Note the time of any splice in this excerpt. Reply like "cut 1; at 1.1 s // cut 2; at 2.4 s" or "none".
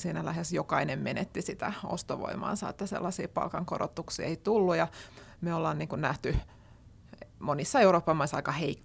none